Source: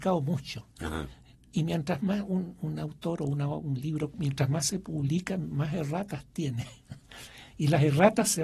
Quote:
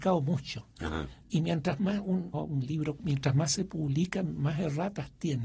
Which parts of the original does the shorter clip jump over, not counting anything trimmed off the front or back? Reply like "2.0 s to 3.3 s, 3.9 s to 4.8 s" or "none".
1.2 s to 1.4 s, 2.6 s to 3.5 s